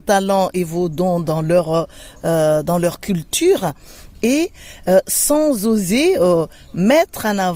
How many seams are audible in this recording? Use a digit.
0